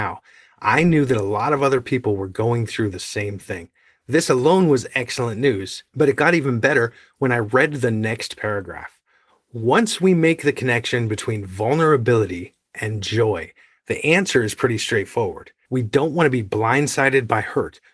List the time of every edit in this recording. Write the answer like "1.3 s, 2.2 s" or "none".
15.6 s